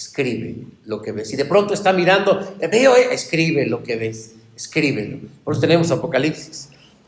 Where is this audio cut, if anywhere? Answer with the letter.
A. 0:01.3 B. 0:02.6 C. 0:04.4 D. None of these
D